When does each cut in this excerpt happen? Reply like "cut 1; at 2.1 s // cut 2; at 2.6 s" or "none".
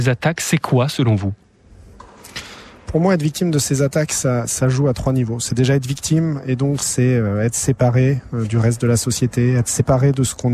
none